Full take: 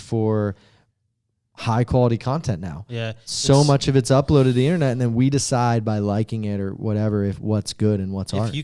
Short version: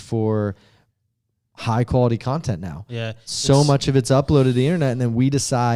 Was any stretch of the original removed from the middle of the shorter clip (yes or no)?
no